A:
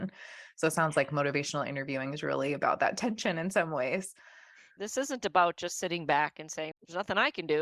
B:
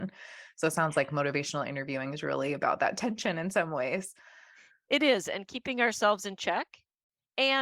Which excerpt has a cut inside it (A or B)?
A